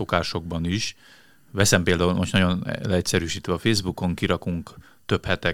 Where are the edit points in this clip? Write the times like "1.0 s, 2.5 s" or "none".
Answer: none